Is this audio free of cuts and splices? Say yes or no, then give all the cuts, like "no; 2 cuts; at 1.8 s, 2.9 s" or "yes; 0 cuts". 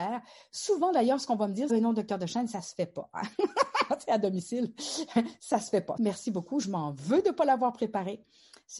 no; 2 cuts; at 1.7 s, 6.0 s